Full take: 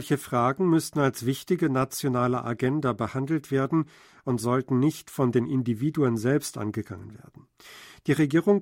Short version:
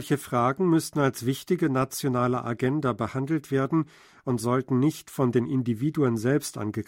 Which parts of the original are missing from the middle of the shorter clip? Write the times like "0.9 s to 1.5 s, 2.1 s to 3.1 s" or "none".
none